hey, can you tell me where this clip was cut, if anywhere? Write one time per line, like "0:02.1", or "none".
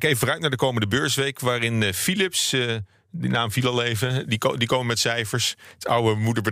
none